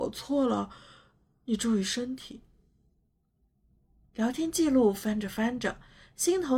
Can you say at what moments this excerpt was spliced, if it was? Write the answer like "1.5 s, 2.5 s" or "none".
none